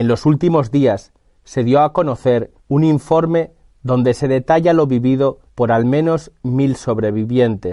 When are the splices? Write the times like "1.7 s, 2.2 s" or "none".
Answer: 2.6 s, 5.5 s